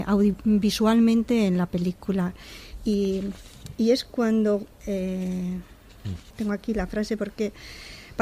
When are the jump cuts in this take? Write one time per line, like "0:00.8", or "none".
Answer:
0:04.7
0:06.3